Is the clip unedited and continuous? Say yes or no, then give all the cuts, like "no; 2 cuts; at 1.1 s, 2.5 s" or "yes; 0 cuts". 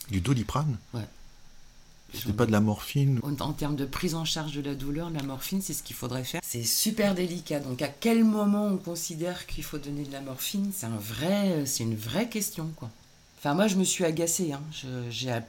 no; 1 cut; at 6.4 s